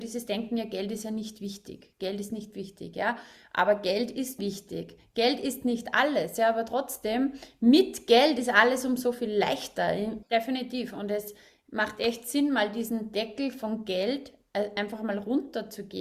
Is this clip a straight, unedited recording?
no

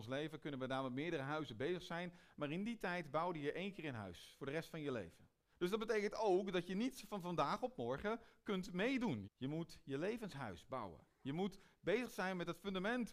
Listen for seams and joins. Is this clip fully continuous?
no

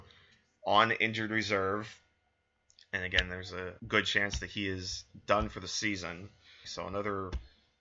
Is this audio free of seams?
no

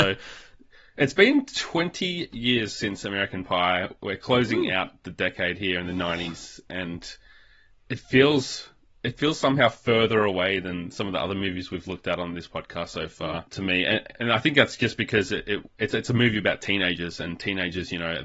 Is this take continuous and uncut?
yes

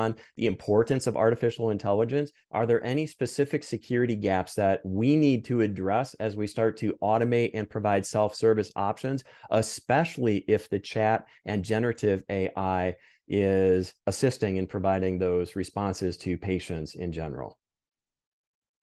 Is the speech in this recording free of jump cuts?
no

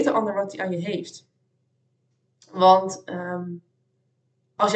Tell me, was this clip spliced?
no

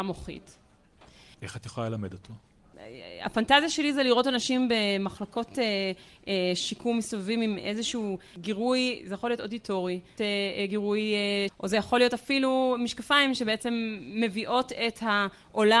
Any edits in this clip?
yes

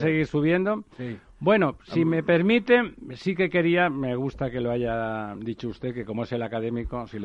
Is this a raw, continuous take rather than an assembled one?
yes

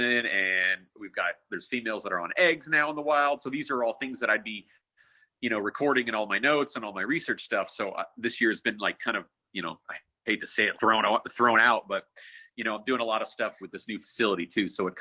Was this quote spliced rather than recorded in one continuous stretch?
yes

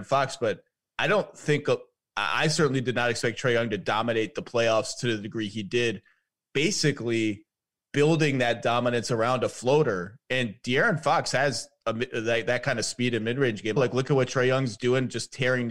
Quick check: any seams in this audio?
yes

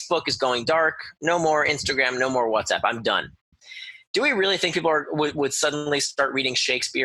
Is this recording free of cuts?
yes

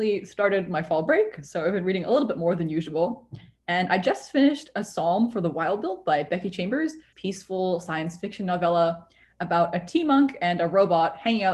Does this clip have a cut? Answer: yes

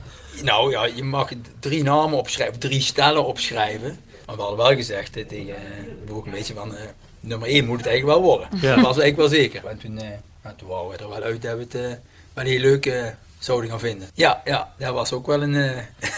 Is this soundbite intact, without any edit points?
no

